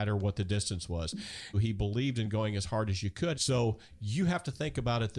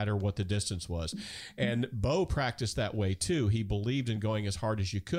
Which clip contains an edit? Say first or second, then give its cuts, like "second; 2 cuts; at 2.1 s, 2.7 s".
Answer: first; 2 cuts; at 1.5 s, 3.3 s